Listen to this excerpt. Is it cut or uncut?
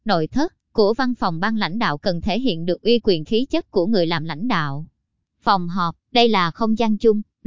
uncut